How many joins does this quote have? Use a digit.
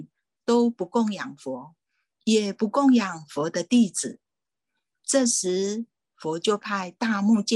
0